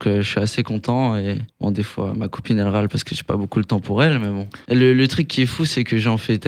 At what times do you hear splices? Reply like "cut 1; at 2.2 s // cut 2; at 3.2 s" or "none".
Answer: cut 1; at 1.5 s // cut 2; at 4.6 s